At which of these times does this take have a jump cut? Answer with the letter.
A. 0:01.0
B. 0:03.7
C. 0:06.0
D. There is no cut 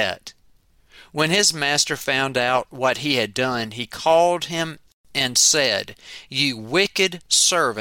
D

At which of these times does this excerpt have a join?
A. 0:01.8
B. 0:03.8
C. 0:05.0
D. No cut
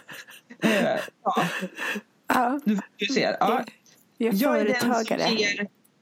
D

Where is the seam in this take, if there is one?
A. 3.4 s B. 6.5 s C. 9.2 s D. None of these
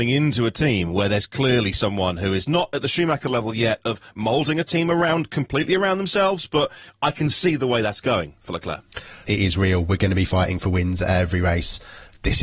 C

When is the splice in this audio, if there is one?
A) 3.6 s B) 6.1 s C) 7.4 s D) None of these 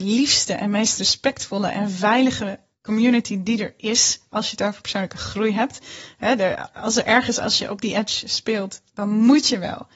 C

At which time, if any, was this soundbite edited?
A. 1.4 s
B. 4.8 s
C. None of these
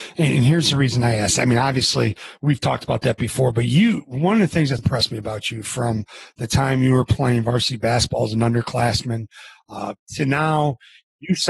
B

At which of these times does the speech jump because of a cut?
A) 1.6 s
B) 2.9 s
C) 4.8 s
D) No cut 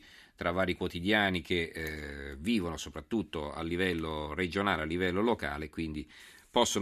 D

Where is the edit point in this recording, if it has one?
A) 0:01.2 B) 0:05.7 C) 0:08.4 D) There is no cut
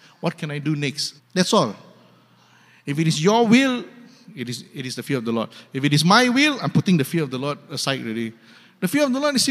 A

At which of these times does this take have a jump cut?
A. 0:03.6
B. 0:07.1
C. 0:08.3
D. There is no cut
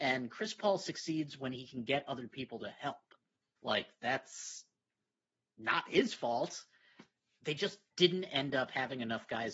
A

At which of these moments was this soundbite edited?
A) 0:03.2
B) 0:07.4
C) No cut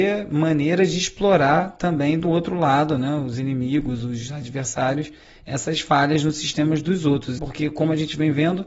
B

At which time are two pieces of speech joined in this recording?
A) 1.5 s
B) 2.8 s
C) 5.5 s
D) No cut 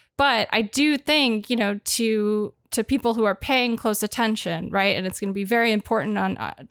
D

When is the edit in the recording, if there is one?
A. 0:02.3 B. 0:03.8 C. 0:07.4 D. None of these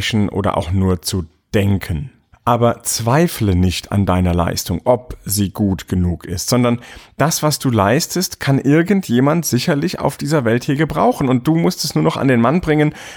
A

